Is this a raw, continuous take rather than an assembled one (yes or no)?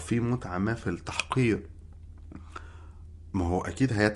yes